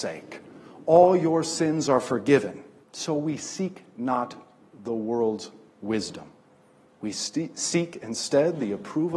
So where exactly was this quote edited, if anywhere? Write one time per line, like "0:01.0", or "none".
0:02.8
0:06.8